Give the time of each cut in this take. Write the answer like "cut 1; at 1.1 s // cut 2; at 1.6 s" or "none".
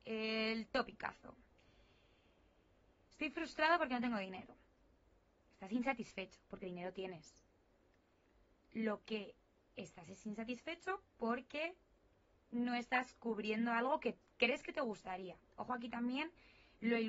cut 1; at 5.4 s

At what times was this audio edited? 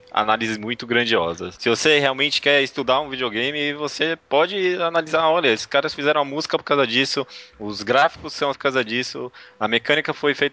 cut 1; at 1.5 s // cut 2; at 8.5 s

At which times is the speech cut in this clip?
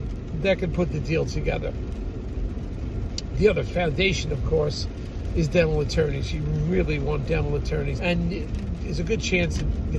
cut 1; at 8.0 s

